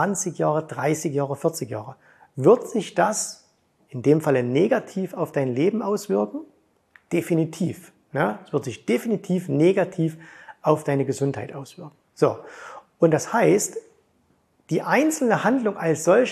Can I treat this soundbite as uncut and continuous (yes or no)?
no